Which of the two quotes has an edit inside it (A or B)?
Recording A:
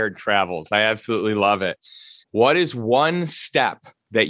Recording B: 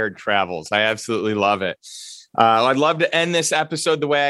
A